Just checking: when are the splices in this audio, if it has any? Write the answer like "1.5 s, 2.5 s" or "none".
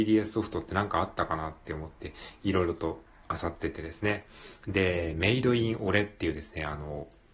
none